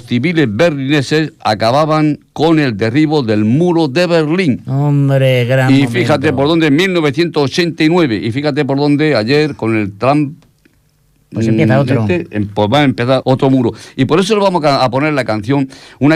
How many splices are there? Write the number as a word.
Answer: one